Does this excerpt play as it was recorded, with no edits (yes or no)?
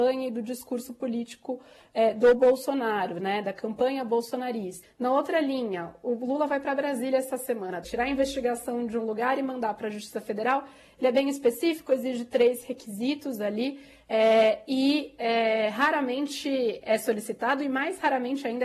no